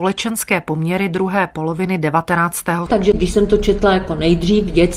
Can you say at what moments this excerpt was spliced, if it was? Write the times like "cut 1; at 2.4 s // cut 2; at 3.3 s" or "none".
cut 1; at 2.9 s